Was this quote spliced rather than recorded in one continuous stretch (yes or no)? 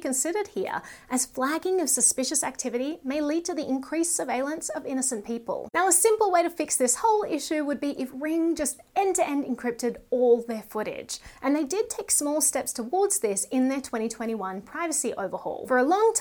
no